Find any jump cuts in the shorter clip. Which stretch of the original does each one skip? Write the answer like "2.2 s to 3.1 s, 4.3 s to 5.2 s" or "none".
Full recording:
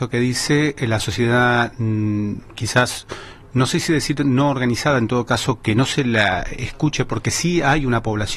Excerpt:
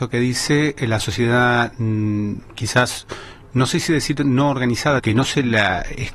5.0 s to 5.6 s